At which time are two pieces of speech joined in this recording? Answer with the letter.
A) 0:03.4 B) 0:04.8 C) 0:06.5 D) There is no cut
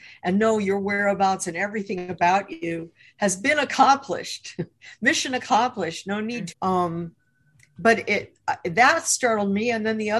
C